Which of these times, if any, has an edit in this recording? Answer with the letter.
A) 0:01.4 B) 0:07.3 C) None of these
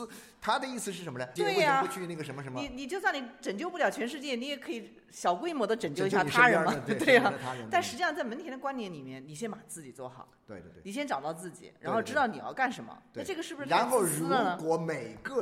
A